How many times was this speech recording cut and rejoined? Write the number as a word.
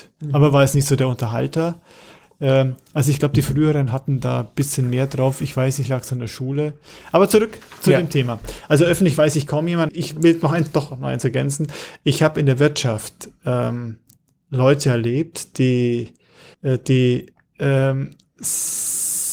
two